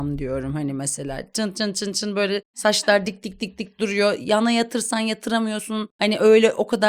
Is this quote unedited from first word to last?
yes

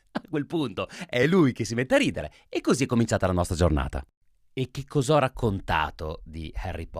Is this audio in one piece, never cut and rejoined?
yes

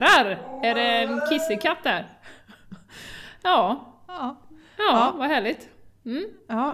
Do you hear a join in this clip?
no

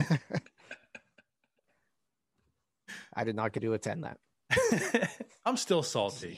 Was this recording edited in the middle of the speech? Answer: yes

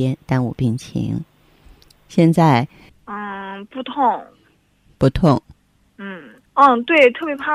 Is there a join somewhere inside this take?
yes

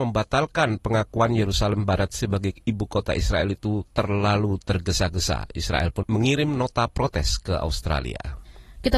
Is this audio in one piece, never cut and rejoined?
no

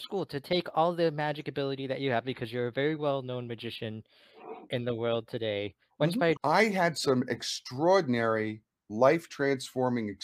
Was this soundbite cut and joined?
yes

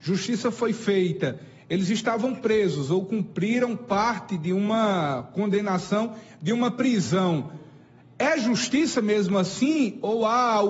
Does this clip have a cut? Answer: no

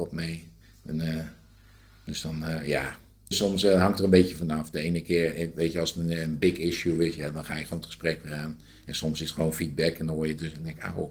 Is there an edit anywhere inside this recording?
yes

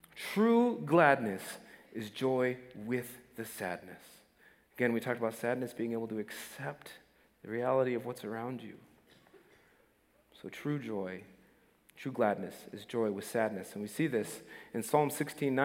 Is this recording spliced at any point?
no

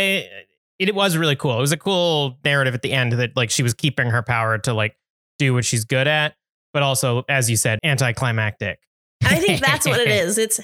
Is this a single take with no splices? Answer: no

